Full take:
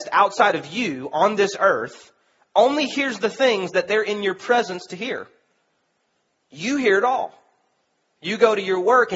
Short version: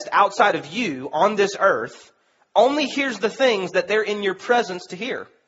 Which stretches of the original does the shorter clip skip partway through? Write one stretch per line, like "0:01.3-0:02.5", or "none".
none